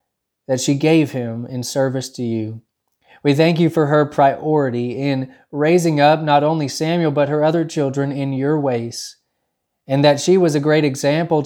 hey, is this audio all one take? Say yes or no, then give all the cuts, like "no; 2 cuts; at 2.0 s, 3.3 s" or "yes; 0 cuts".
yes; 0 cuts